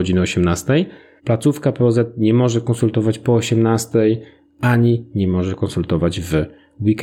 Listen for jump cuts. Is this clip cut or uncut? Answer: cut